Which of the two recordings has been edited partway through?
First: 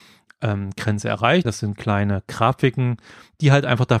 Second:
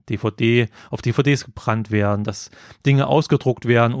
first; 1 cut; at 1.4 s

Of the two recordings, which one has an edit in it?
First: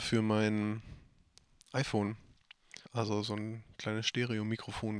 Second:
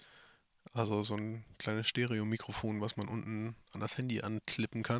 first; 1 cut; at 2.9 s

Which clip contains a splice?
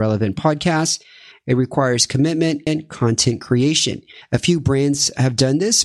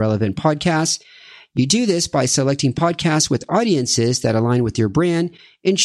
first; 3 cuts; at 1.3 s, 2.7 s, 4.2 s

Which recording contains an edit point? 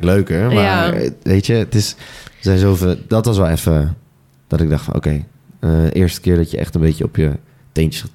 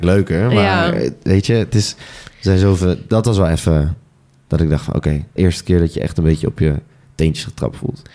second; 1 cut; at 5.4 s

